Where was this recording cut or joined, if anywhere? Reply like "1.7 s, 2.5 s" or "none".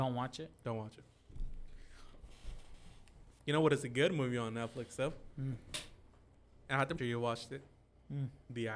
3.4 s, 7.0 s